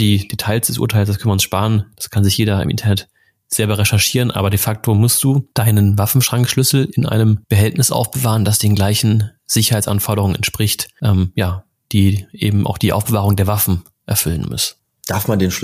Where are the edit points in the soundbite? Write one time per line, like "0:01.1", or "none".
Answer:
none